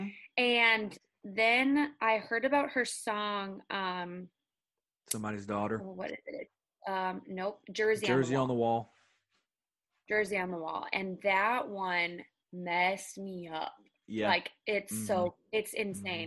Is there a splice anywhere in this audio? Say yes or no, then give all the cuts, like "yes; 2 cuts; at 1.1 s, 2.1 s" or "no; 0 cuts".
no; 0 cuts